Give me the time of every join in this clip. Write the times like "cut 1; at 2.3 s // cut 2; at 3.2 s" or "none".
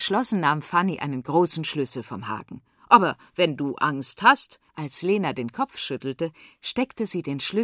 cut 1; at 4.7 s